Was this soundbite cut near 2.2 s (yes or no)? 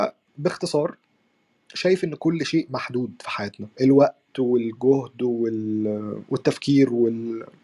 yes